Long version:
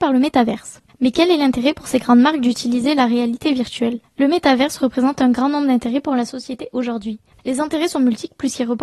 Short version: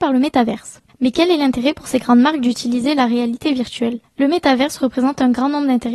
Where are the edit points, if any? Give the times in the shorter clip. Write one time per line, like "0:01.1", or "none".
none